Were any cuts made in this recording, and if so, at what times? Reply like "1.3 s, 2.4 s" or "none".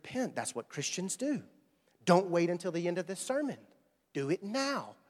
none